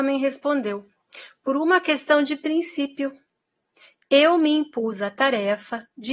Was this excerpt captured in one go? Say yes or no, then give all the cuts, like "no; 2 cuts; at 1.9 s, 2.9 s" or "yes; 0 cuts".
yes; 0 cuts